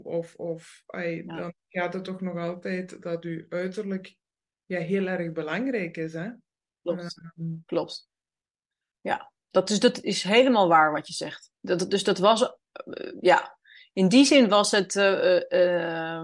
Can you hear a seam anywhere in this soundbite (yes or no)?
no